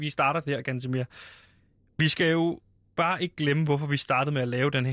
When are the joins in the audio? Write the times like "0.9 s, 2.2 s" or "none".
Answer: none